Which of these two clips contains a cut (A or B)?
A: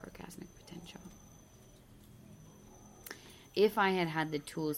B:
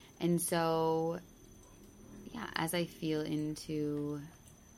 A